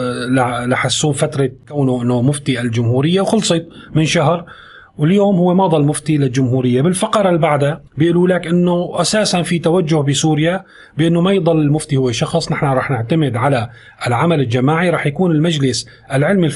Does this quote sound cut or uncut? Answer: cut